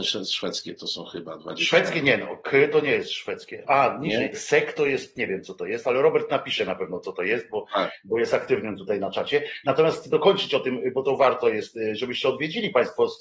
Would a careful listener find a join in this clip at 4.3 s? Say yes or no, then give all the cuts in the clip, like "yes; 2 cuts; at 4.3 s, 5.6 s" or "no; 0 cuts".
yes; 1 cut; at 4.3 s